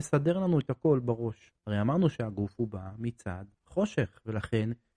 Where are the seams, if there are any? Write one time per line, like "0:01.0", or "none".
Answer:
0:01.5
0:03.5